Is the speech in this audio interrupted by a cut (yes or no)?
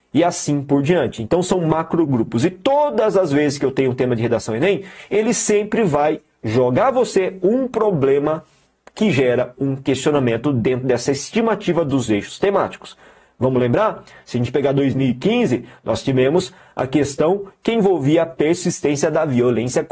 no